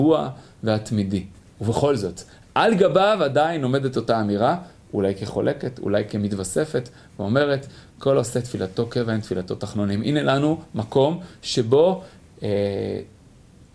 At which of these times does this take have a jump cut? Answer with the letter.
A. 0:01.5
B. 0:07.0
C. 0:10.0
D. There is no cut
D